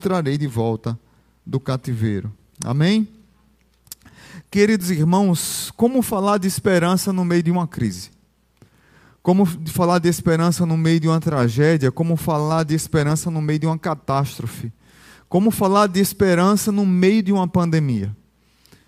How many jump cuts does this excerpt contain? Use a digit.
0